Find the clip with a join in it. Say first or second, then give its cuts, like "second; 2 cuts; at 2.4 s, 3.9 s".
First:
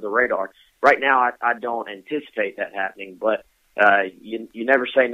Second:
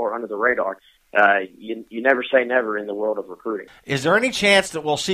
second; 2 cuts; at 1.0 s, 3.7 s